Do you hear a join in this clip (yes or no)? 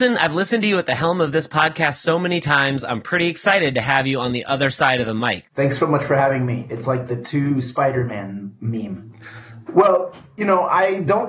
yes